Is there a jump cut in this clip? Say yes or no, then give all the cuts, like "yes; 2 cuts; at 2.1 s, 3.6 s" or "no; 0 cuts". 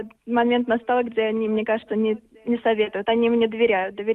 no; 0 cuts